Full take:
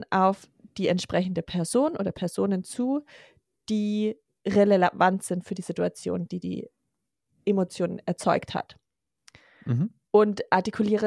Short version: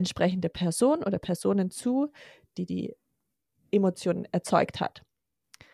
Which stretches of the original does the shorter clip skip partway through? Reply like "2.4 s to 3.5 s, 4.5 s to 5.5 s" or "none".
3.5 s to 6.3 s